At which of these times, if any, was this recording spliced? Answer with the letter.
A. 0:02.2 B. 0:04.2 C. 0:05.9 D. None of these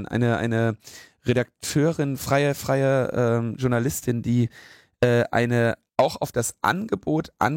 C